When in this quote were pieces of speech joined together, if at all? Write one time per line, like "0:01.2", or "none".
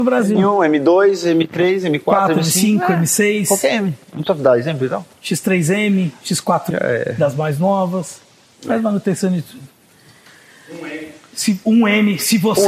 0:06.7